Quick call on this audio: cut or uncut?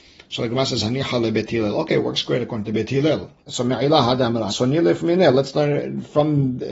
cut